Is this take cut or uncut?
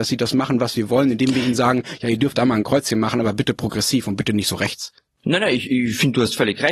cut